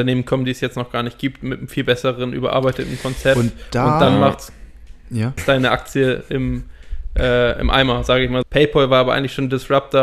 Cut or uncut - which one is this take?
cut